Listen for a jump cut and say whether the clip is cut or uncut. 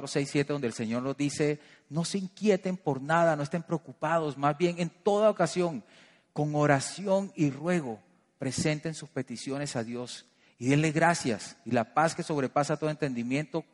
uncut